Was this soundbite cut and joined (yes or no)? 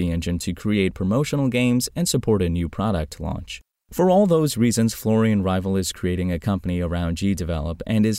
yes